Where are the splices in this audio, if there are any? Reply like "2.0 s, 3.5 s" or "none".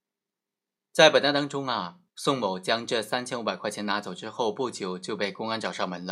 2.1 s